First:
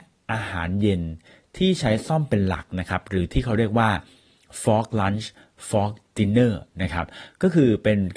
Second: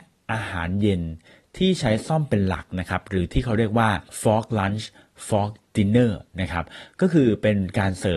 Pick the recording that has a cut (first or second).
second